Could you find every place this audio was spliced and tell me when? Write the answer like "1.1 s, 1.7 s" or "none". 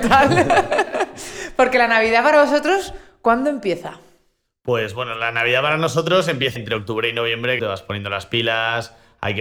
6.6 s, 7.6 s